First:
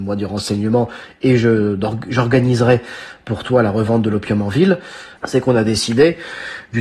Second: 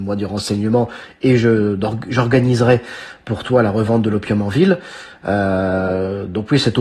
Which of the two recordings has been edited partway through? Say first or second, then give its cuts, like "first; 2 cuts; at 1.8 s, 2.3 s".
first; 1 cut; at 5.2 s